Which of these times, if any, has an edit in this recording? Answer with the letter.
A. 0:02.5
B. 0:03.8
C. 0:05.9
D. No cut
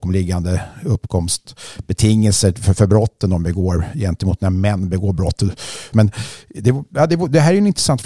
C